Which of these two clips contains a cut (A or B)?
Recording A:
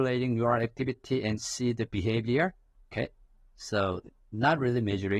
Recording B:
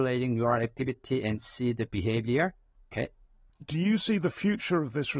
B